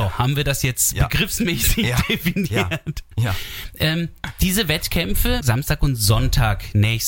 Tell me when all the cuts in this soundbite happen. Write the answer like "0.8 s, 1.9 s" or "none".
5.4 s